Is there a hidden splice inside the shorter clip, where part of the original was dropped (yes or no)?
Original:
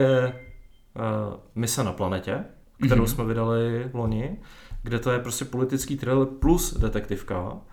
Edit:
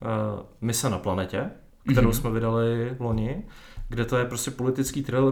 no